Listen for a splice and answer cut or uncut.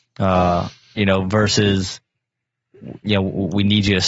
uncut